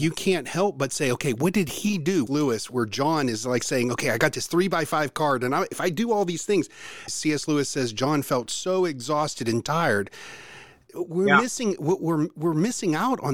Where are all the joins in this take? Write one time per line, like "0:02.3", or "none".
0:02.3
0:07.1